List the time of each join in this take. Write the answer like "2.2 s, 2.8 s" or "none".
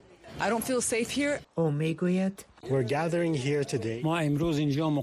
1.4 s